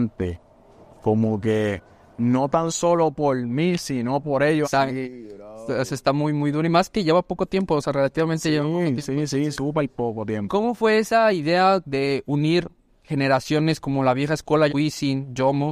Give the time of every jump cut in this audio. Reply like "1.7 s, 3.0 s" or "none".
4.6 s, 11.8 s, 14.7 s